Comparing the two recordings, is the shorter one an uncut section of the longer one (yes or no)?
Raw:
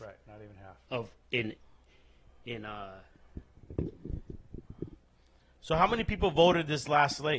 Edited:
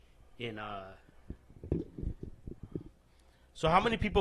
yes